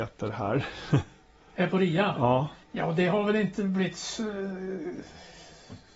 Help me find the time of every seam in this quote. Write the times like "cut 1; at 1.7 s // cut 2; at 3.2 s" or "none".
cut 1; at 2.6 s